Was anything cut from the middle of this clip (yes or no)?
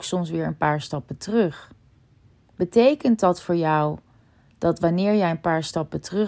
no